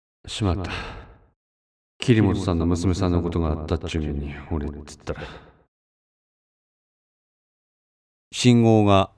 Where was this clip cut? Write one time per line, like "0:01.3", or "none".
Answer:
0:08.1